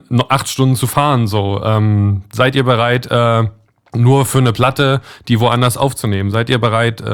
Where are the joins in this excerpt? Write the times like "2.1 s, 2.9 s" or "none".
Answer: none